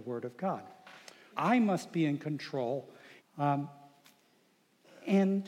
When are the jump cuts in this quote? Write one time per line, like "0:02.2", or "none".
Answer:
0:01.3
0:03.2